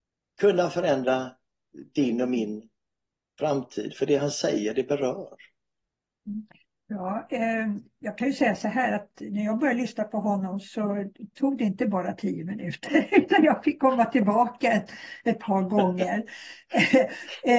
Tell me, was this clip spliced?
no; 0 cuts

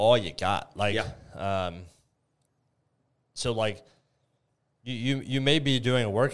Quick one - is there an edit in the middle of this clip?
no; 0 cuts

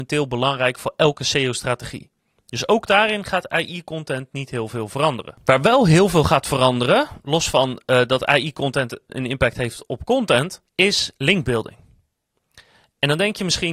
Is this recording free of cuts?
no; 2 cuts; at 9.1 s, 10.7 s

